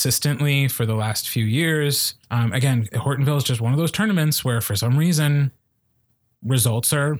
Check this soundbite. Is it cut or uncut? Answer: cut